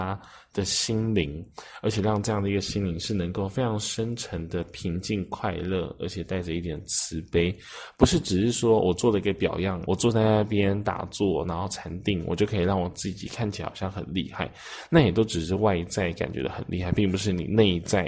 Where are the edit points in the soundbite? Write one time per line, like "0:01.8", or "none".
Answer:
0:09.9